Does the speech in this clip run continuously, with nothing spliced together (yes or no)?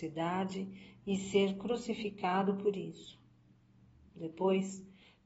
no